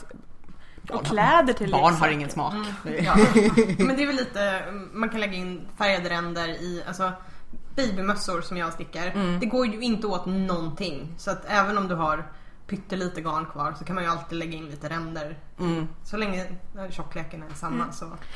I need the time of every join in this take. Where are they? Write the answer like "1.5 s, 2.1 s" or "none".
none